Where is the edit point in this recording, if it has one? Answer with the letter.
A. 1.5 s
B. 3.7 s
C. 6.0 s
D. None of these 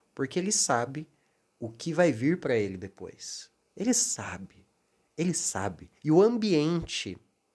C